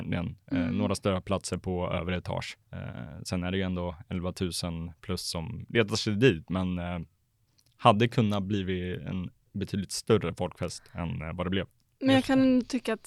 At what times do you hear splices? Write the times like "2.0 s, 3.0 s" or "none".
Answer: 2.6 s